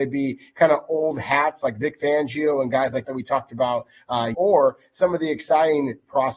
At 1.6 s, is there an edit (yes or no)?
no